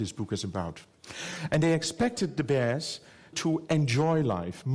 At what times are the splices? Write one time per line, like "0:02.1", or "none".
0:01.5
0:03.3

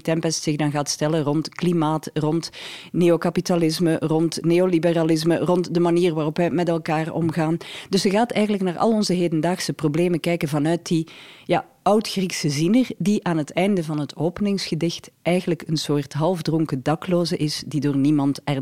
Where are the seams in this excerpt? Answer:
none

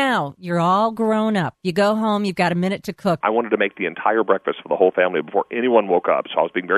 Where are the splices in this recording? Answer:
0:03.2

